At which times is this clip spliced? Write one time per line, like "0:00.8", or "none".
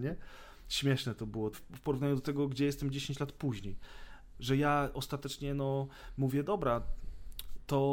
0:01.5
0:04.3

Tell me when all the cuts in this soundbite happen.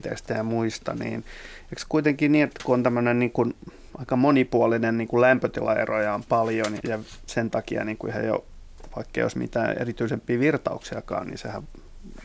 0:06.8

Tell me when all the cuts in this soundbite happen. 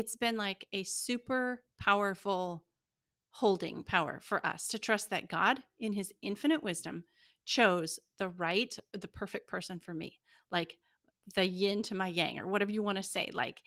none

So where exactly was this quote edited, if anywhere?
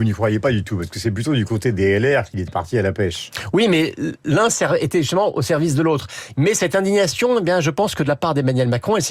0:06.3

